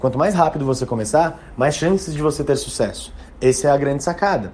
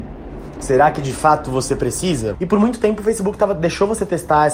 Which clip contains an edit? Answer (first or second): second